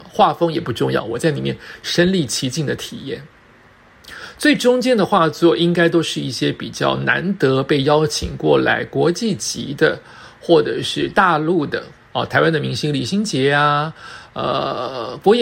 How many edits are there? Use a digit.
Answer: 2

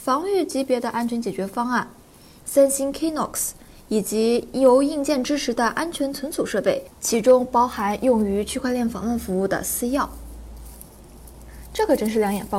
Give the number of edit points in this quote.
0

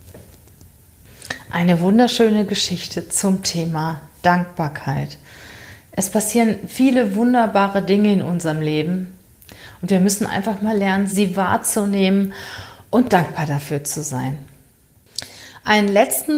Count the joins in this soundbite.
1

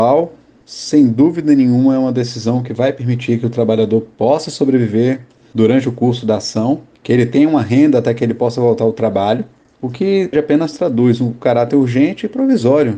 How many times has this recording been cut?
1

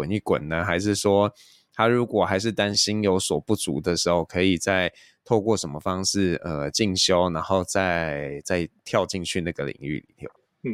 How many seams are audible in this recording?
1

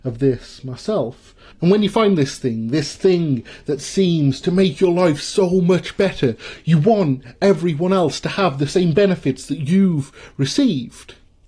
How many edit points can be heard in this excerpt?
1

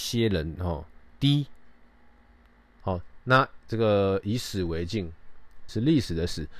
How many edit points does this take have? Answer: 2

